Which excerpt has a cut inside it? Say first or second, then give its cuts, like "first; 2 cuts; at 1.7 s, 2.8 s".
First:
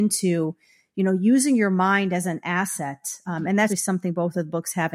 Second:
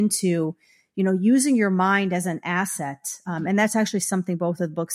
first; 1 cut; at 3.7 s